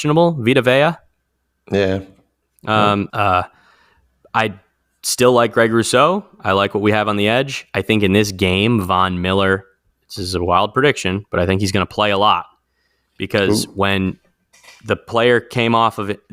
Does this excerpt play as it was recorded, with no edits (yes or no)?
no